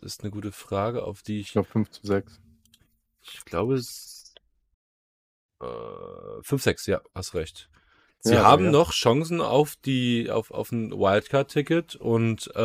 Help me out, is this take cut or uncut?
cut